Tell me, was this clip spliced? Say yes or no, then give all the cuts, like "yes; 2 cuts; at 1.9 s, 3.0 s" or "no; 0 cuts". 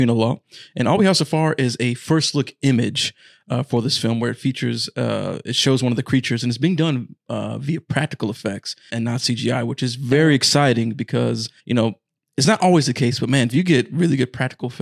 yes; 2 cuts; at 8.9 s, 11.6 s